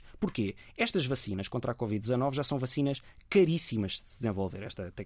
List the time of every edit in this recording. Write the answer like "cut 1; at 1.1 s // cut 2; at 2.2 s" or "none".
none